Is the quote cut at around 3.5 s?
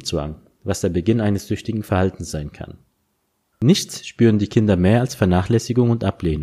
yes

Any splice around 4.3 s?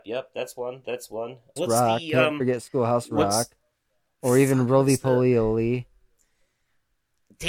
no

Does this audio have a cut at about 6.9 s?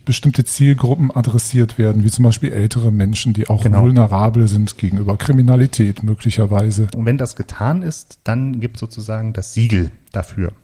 yes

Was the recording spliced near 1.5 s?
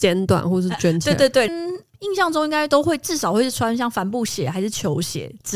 yes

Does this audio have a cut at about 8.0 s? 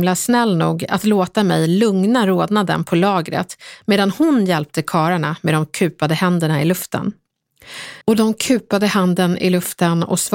yes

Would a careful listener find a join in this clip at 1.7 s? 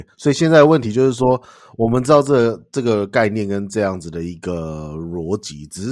no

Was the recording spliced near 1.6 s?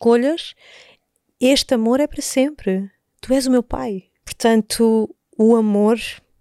no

